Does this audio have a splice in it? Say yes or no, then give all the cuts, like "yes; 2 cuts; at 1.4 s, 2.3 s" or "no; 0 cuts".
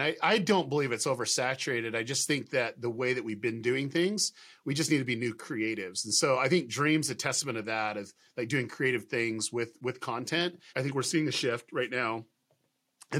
yes; 1 cut; at 10.7 s